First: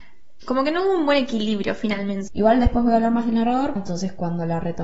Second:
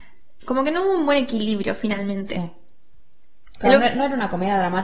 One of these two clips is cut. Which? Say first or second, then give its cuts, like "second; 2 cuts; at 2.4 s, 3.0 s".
first; 2 cuts; at 2.3 s, 3.8 s